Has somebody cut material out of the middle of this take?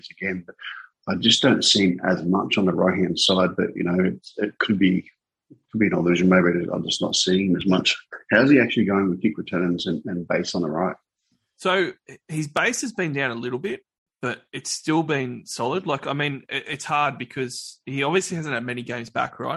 no; 0 cuts

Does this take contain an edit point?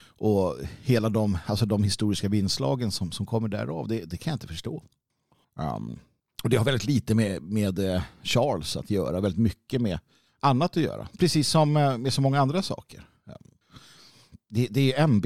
no; 0 cuts

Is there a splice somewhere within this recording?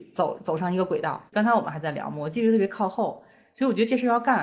yes; 1 cut; at 1.3 s

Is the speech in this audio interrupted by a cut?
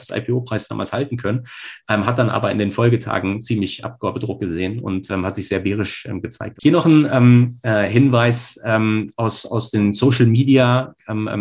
yes; 1 cut; at 6.6 s

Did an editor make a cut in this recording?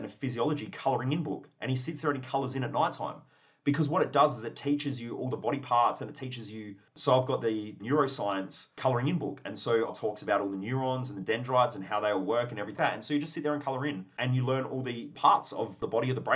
yes; 2 cuts; at 6.9 s, 12.8 s

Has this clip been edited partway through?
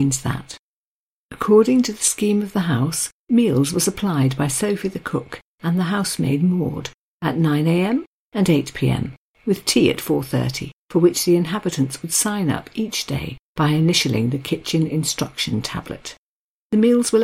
yes; 1 cut; at 8.2 s

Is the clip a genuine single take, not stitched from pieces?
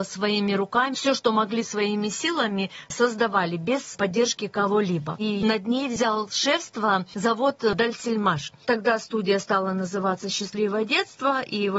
no; 1 cut; at 0.9 s

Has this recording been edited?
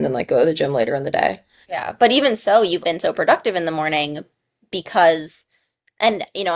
yes; 2 cuts; at 1.6 s, 2.8 s

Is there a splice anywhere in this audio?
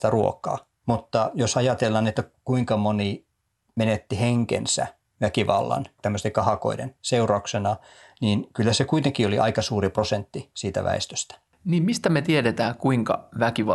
no; 0 cuts

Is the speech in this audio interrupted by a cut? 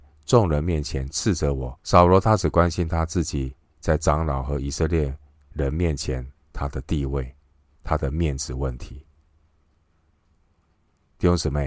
yes; 1 cut; at 1.8 s

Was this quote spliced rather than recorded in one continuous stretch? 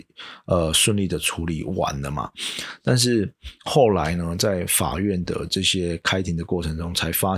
no; 0 cuts

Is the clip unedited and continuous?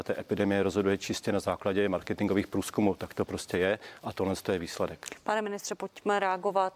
yes; 0 cuts

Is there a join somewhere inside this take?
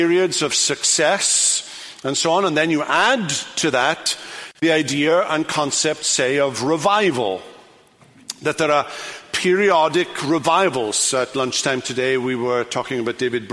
no; 0 cuts

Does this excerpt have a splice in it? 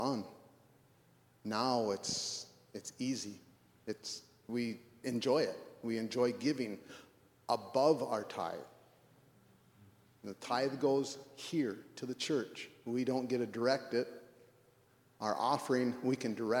no; 0 cuts

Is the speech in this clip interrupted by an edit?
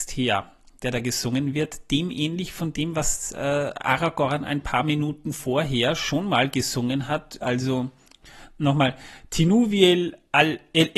yes; 1 cut; at 7.4 s

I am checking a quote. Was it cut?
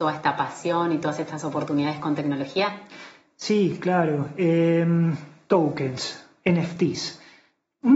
no; 0 cuts

